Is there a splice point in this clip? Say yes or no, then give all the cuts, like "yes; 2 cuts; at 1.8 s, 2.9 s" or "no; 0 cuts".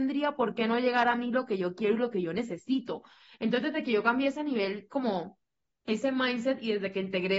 no; 0 cuts